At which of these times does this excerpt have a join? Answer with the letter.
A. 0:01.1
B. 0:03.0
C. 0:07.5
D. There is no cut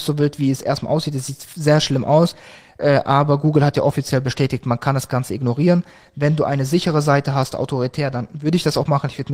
C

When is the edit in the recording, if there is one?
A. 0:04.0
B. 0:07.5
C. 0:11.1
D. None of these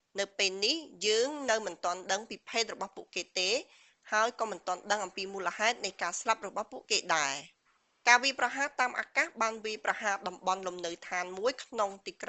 D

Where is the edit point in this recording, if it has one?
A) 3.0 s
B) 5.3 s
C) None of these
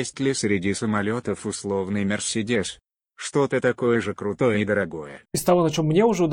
B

